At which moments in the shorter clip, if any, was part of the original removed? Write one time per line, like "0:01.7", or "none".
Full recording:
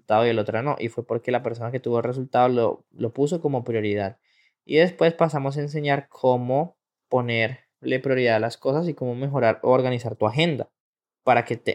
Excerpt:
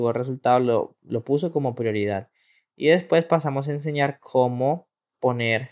none